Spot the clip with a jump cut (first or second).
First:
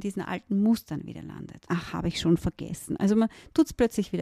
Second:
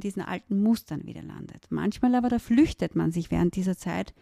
first